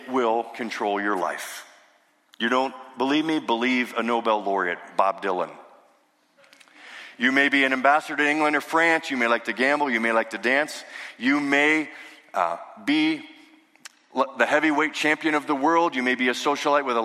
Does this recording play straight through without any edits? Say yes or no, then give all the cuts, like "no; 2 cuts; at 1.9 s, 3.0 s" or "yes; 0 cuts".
yes; 0 cuts